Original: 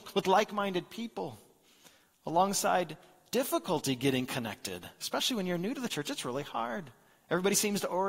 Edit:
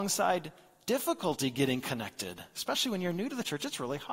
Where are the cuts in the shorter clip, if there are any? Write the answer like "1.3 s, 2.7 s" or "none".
none